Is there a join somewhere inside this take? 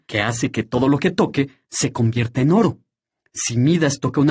no; 0 cuts

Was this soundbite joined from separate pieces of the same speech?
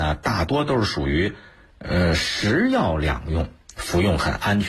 no; 0 cuts

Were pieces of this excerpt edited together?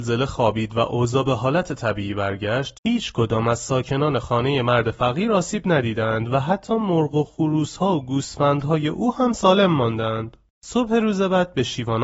yes; 1 cut; at 2.7 s

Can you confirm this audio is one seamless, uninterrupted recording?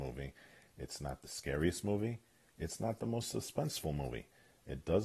yes; 0 cuts

